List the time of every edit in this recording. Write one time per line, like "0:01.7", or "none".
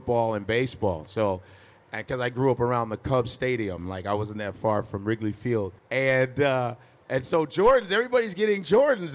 0:05.8